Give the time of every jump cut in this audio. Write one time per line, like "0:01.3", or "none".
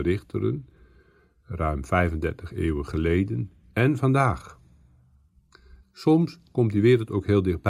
0:05.8

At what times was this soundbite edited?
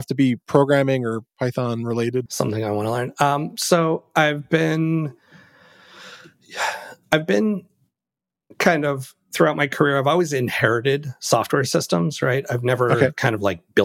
0:02.3

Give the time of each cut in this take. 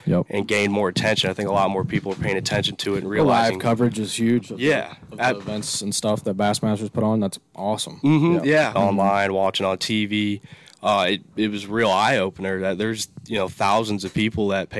0:08.8

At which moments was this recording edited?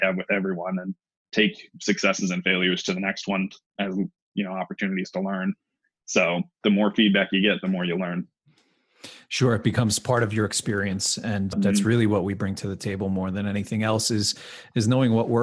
0:11.5

